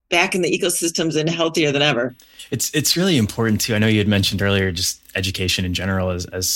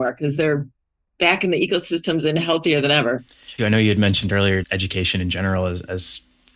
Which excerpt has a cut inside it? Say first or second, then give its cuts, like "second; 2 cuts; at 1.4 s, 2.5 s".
second; 2 cuts; at 3.6 s, 4.6 s